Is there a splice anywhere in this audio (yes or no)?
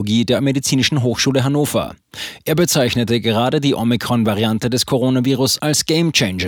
no